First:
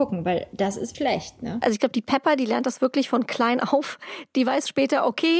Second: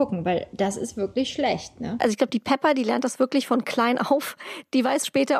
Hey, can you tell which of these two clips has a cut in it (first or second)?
first